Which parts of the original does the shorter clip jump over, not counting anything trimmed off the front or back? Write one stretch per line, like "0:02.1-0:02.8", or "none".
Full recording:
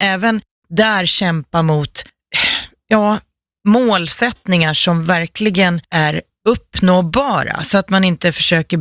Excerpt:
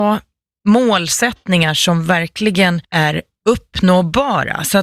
none